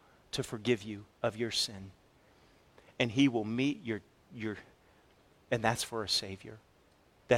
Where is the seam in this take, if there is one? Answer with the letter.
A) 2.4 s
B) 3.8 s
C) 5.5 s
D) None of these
C